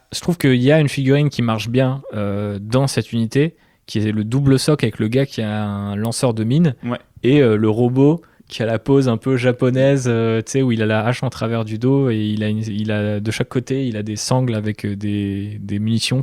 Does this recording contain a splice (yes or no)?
no